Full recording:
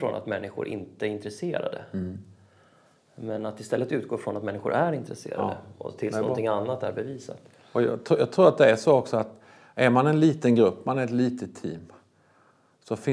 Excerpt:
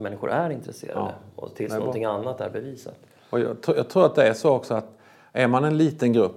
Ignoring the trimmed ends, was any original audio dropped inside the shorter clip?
no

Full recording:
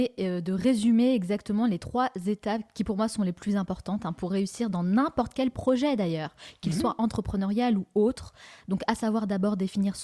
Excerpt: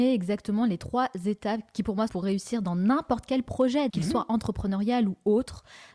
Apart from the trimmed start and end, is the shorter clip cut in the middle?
yes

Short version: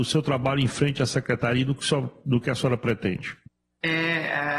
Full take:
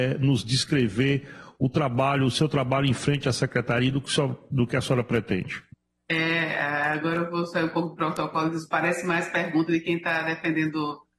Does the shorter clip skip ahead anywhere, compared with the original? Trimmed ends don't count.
no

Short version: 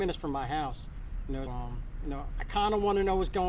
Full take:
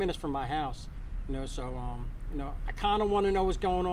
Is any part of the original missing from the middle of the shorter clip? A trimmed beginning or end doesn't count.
yes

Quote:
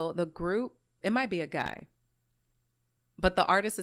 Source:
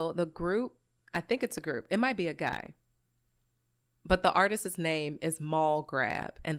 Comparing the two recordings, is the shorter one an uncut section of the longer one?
no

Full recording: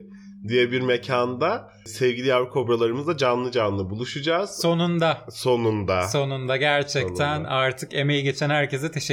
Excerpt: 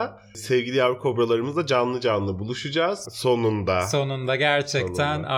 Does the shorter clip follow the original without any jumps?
no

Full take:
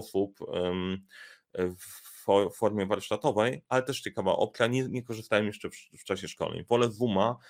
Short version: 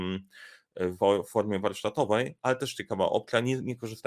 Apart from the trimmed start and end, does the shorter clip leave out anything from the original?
yes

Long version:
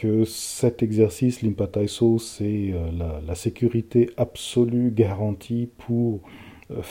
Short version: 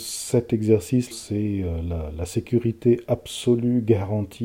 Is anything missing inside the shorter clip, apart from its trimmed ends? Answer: yes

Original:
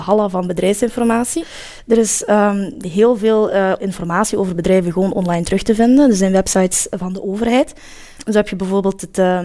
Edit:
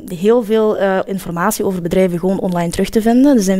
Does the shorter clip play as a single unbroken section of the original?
yes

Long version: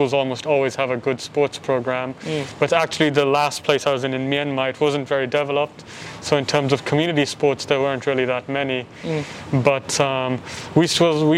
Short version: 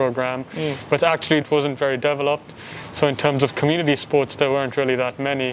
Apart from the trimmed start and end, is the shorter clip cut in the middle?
yes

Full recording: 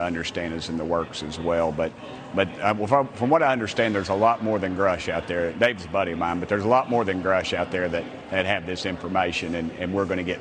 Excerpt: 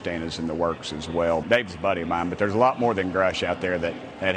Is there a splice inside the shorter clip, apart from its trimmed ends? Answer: yes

